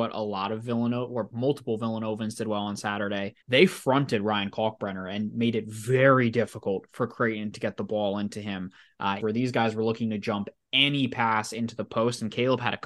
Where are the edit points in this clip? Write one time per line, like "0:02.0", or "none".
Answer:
0:03.4
0:09.2